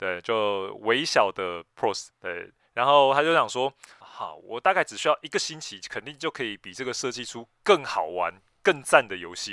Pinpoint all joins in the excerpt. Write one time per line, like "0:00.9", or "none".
0:02.1
0:04.0